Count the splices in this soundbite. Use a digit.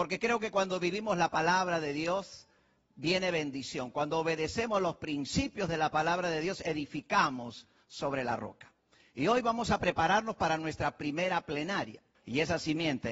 1